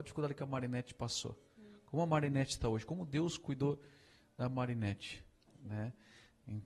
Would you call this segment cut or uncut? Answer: uncut